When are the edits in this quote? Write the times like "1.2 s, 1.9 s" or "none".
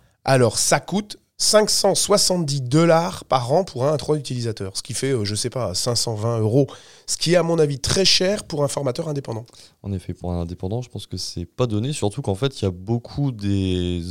none